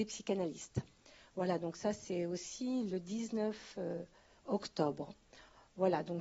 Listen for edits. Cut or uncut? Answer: uncut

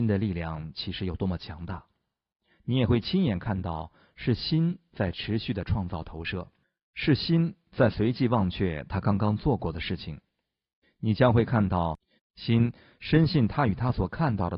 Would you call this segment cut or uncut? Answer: cut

